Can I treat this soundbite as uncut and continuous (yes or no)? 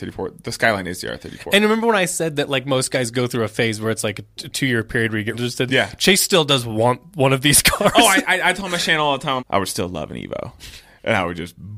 no